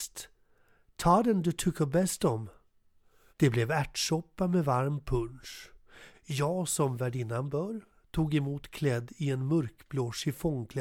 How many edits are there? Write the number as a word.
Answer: two